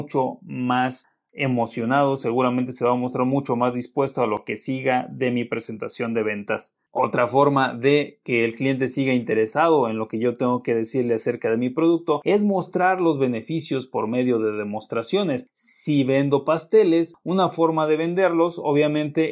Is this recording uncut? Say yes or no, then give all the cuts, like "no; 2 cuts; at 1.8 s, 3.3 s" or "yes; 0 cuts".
yes; 0 cuts